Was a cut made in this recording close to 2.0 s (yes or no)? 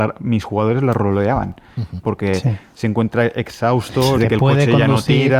yes